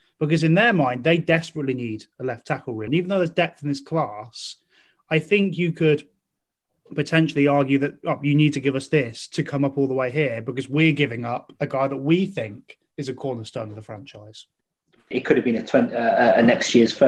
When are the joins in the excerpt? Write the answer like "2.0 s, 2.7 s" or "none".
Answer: 2.9 s, 15.1 s